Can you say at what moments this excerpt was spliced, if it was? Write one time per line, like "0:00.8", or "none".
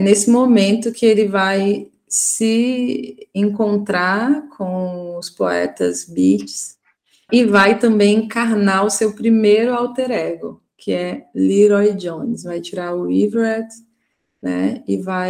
0:07.3